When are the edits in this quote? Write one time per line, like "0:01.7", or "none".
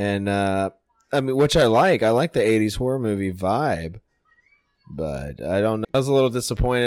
0:05.8